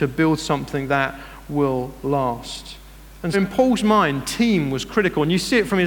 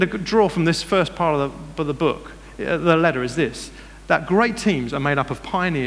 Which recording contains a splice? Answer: first; 1 cut; at 3.3 s

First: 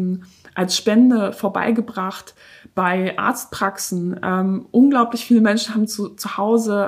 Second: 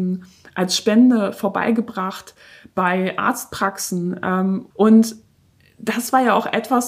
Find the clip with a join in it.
second; 1 cut; at 4.7 s

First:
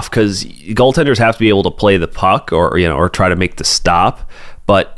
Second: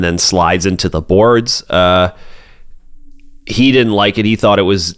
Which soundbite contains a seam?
second; 1 cut; at 3.4 s

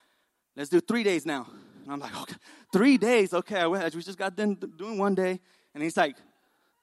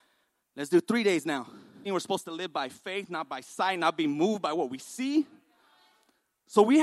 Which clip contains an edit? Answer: second; 1 cut; at 1.8 s

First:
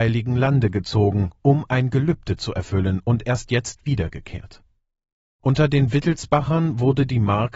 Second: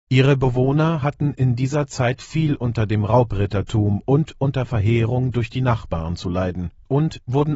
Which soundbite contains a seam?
first; 1 cut; at 5.3 s

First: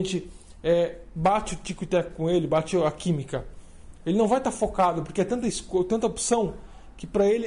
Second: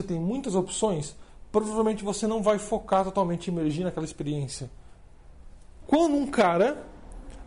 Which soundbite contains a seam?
second; 1 cut; at 5.8 s

